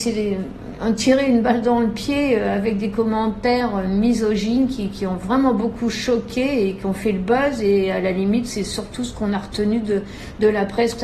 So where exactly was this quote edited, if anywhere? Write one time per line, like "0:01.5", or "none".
none